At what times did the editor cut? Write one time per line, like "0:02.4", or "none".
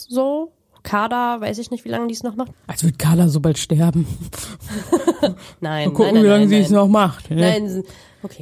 0:02.5